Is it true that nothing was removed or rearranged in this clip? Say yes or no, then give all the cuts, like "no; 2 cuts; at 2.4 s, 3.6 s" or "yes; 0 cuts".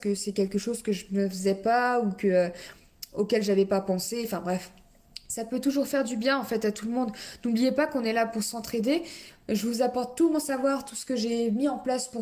yes; 0 cuts